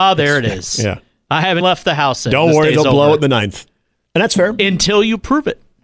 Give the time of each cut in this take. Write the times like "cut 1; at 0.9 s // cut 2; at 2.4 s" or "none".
cut 1; at 1.6 s // cut 2; at 4.1 s